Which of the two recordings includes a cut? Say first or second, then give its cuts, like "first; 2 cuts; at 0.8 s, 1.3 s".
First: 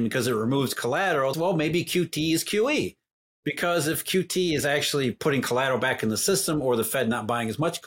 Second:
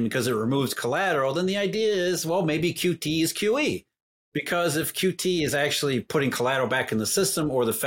first; 1 cut; at 1.3 s